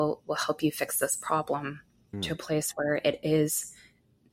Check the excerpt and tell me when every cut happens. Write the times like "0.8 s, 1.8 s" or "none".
2.1 s